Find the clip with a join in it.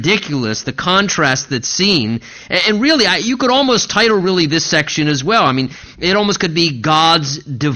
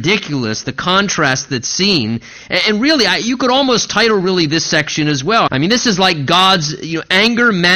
second; 1 cut; at 5.5 s

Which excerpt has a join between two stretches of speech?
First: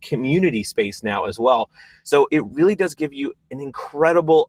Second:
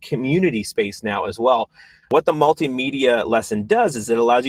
second; 1 cut; at 2.0 s

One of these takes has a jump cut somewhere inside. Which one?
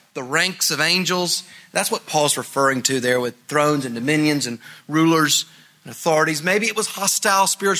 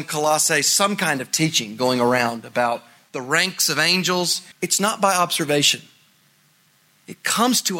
second; 1 cut; at 4.5 s

